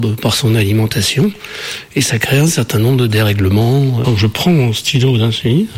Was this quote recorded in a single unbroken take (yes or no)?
no